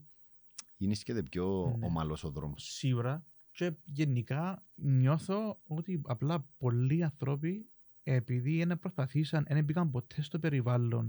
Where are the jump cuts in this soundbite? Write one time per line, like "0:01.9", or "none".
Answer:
0:04.7